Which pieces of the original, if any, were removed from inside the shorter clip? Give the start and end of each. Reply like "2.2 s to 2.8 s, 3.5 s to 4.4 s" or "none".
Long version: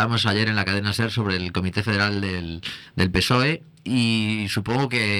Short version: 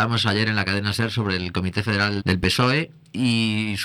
2.2 s to 2.9 s